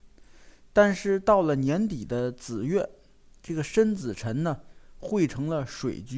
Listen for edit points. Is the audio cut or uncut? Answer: uncut